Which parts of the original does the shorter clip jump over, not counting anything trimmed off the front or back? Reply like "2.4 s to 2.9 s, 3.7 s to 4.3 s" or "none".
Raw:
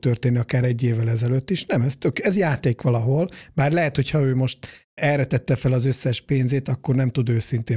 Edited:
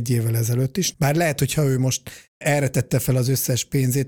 1.7 s to 3.5 s

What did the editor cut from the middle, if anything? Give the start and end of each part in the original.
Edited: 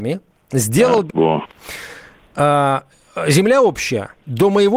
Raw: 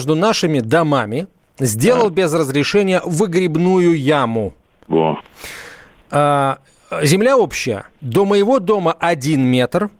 2.2 s to 4.8 s

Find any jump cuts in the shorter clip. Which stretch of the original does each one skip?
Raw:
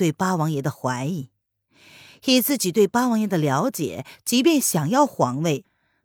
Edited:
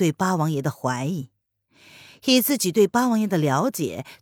none

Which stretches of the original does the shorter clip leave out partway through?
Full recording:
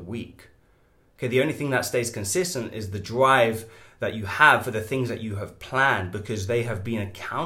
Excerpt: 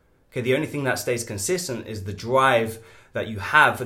none

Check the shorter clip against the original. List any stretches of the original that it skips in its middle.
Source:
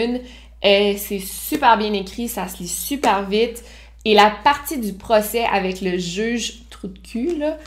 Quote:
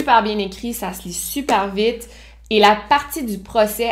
none

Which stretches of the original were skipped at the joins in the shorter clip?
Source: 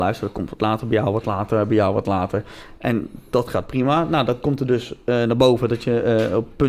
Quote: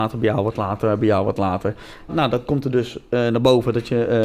2.8 s to 4.0 s

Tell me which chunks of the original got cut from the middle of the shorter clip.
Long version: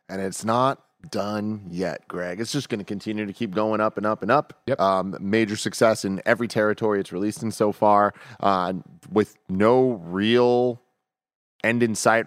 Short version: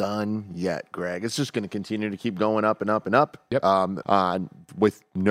5.2 s to 8.4 s

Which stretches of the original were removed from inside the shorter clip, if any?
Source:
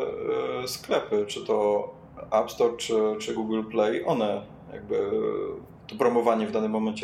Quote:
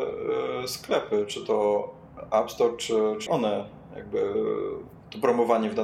3.3 s to 4.0 s

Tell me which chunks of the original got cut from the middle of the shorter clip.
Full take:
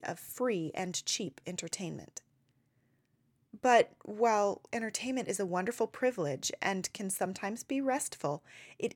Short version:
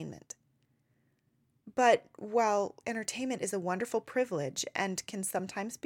none

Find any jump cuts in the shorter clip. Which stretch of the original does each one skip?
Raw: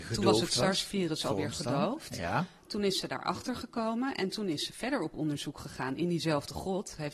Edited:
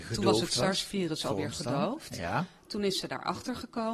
none

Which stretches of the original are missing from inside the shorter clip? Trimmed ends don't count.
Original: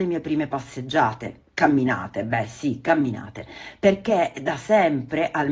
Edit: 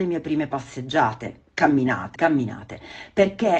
2.2 s to 2.8 s

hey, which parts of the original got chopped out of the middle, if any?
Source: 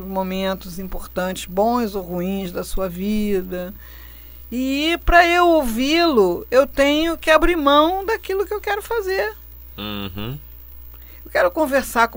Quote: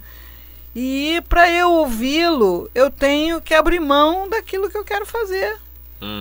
none

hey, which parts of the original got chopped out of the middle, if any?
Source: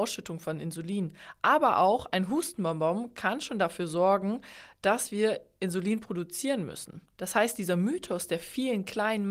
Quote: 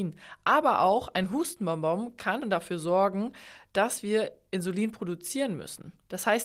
3.4 s to 3.5 s

